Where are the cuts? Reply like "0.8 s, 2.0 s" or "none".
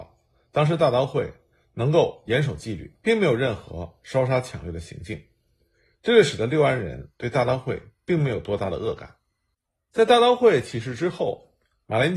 3.0 s